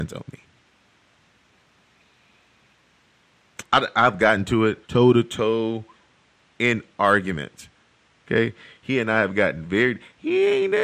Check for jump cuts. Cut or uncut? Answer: cut